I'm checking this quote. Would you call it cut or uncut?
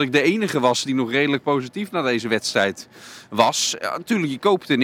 uncut